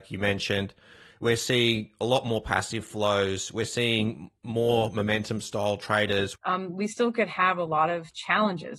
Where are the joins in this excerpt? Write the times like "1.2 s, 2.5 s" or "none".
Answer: 6.3 s